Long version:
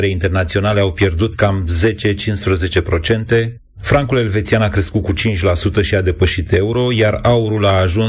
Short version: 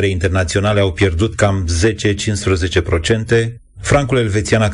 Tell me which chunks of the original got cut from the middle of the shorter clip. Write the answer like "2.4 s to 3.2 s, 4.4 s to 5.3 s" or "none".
none